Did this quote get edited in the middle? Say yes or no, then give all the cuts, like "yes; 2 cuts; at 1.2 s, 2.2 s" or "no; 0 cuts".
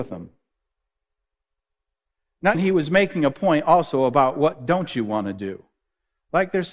yes; 1 cut; at 2.5 s